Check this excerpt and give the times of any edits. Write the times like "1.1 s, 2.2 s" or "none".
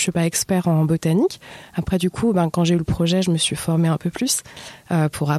none